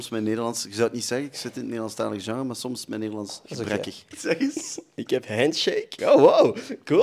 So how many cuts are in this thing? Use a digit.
2